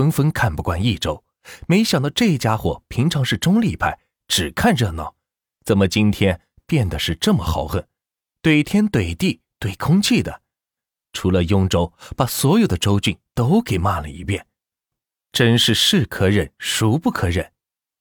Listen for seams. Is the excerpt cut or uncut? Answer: uncut